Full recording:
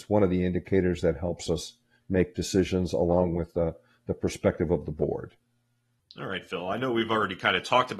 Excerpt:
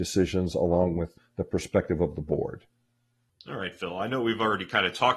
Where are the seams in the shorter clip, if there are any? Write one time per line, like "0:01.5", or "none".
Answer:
0:01.2